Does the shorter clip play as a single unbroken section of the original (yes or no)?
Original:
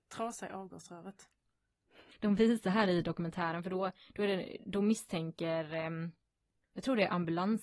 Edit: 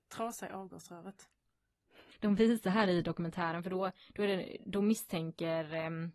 yes